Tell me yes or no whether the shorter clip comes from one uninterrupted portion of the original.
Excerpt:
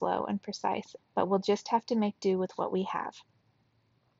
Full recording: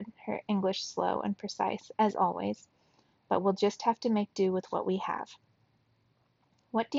no